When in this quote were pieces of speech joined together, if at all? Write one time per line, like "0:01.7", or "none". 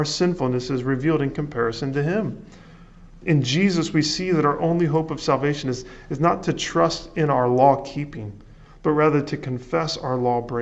none

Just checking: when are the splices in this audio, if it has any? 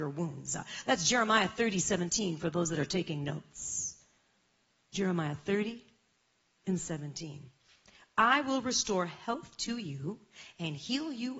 none

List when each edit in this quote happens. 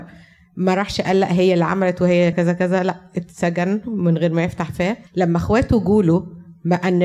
0:02.3
0:05.1

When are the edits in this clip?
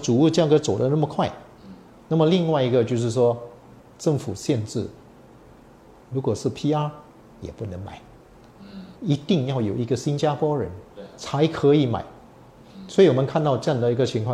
0:02.0
0:08.9

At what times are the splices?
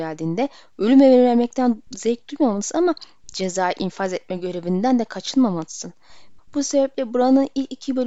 0:06.4

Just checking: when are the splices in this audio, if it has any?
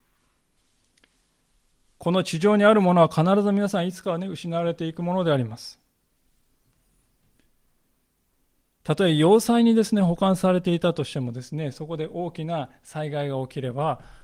none

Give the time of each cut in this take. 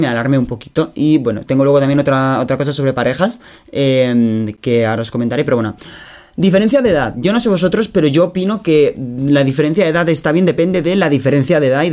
none

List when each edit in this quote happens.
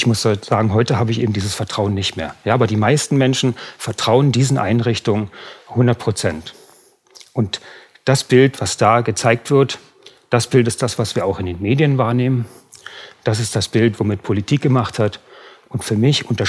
none

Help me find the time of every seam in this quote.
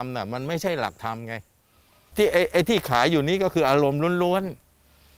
none

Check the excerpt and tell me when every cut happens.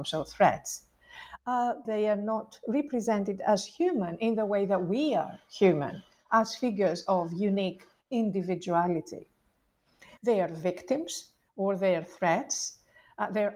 0:01.8
0:10.2

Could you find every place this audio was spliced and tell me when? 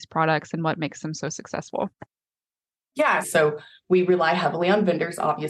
0:03.2

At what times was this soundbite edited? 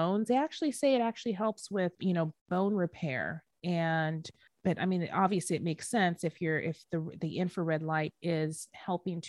0:02.3

